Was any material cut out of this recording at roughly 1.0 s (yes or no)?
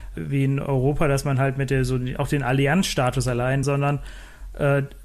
no